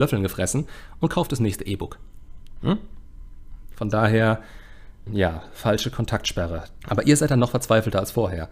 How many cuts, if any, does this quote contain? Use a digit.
2